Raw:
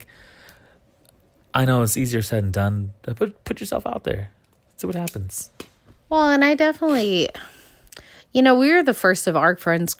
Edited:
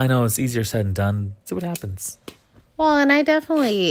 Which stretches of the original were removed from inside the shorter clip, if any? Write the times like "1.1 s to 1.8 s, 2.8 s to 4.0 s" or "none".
3.0 s to 4.7 s

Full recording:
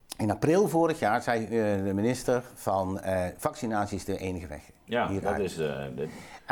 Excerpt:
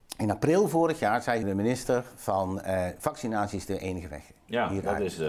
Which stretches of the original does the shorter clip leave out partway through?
1.4 s to 1.8 s

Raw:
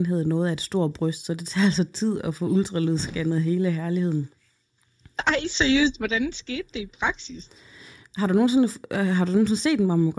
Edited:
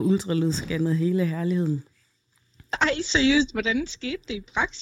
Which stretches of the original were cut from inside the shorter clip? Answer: none

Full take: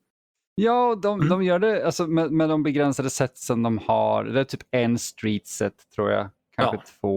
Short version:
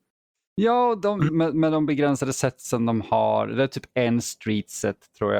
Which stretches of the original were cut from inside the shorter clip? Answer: 1.3 s to 2.1 s

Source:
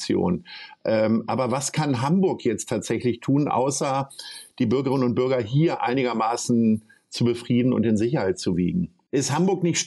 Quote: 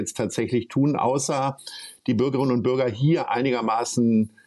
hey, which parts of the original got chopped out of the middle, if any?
none

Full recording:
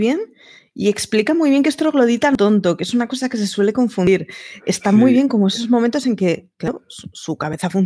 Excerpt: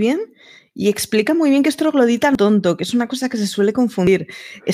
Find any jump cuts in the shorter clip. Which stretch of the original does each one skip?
none

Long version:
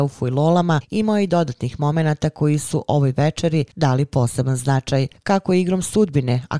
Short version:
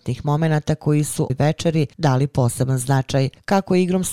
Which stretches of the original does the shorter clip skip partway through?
2.8 s to 3.1 s

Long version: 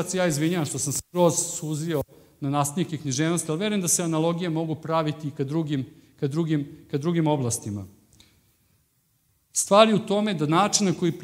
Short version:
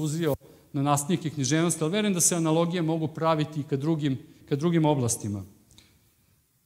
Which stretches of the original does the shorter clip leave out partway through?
6.1 s to 6.8 s

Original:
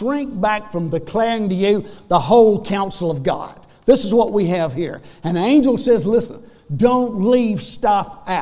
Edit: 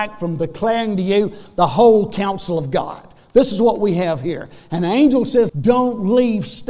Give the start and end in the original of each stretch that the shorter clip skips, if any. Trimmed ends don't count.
6.0 s to 6.6 s

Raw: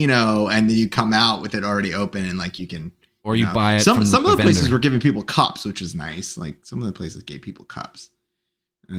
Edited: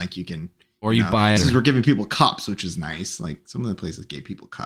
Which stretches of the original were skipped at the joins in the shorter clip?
3.8 s to 4.5 s

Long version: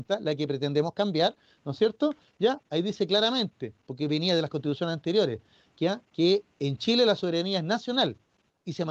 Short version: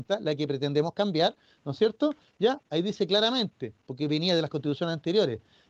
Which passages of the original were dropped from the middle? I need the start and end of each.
none

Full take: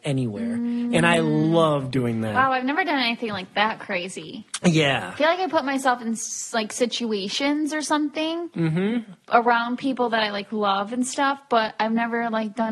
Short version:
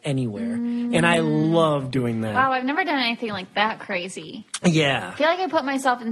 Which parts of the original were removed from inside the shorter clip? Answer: none

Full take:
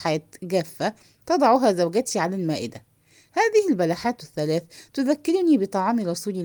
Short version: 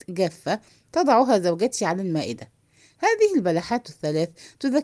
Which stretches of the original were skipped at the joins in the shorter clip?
none

